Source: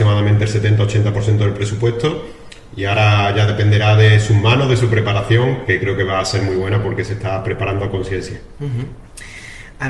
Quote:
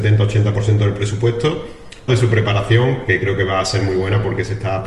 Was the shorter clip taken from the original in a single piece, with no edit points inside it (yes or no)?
no